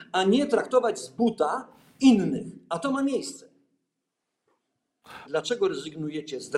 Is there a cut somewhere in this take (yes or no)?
yes